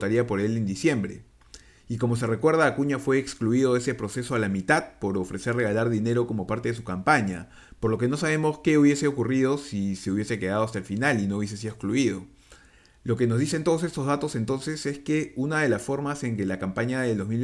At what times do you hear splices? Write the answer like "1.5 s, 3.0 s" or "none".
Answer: none